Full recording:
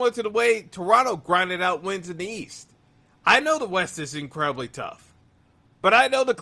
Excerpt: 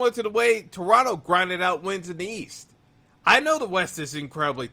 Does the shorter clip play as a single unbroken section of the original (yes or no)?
yes